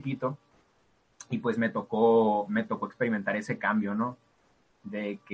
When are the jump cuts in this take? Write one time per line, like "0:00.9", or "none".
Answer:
none